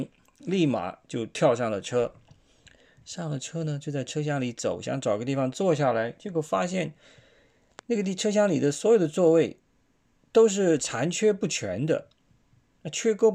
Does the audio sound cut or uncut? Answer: uncut